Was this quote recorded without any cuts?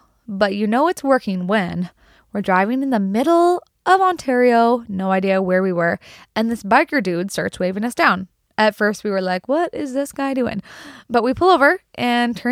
yes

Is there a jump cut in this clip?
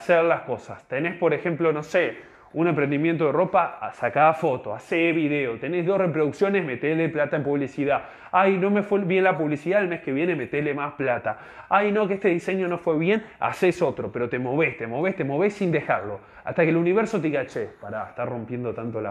no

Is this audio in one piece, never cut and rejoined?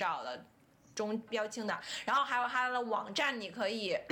no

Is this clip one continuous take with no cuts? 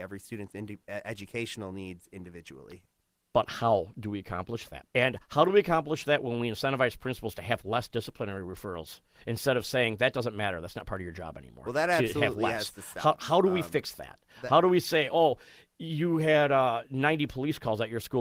no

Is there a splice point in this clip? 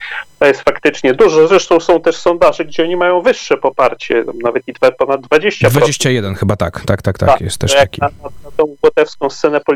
no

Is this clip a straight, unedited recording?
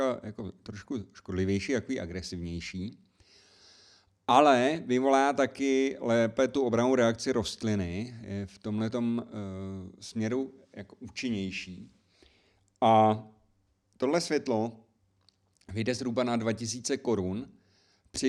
yes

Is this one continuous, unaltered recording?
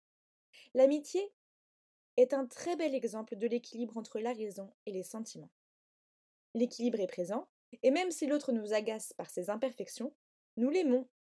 no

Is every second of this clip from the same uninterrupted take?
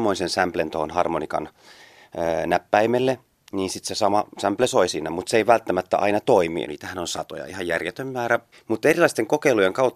no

